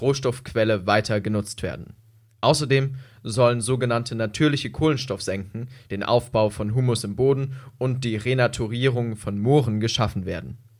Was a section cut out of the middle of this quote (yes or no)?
yes